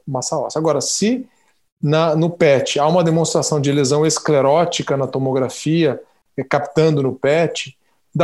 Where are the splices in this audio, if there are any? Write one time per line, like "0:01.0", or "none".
none